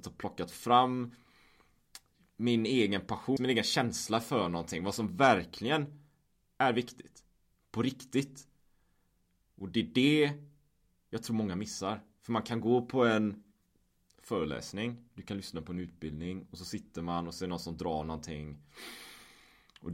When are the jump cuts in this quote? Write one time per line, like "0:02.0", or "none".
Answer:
0:03.4

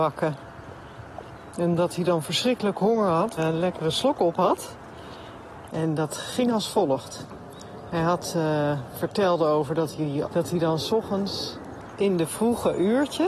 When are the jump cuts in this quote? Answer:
0:03.4
0:05.7
0:10.2

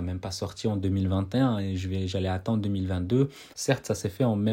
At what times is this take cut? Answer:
0:03.5

